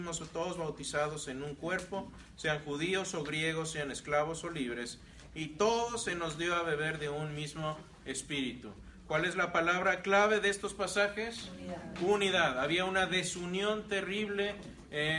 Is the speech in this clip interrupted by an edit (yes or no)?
no